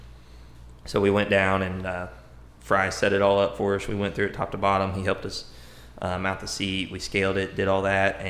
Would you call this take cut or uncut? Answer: uncut